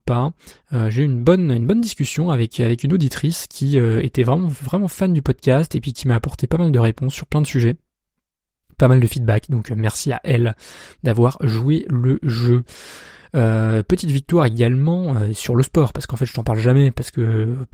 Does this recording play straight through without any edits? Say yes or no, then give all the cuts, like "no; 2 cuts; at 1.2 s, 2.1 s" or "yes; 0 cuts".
yes; 0 cuts